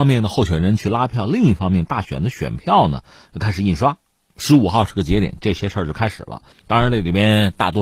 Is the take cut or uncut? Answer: cut